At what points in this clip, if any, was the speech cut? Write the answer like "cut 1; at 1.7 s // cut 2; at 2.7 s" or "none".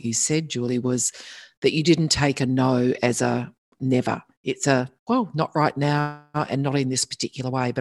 none